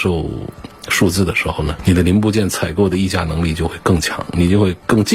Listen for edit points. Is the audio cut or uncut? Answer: uncut